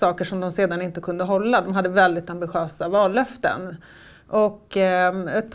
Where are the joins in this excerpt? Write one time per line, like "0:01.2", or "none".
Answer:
none